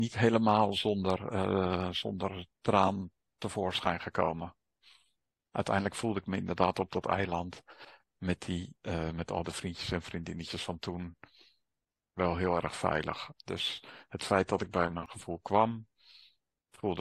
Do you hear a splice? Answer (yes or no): yes